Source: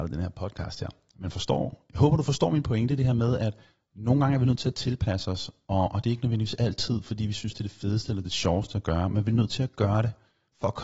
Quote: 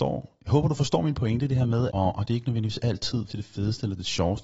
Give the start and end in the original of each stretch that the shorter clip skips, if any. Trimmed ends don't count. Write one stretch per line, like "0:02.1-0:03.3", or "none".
0:03.4-0:05.7
0:07.0-0:07.5